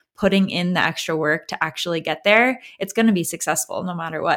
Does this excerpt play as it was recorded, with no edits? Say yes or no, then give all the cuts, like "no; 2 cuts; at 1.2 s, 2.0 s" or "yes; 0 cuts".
yes; 0 cuts